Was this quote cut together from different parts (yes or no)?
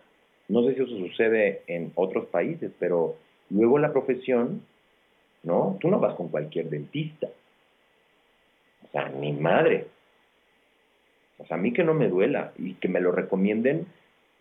yes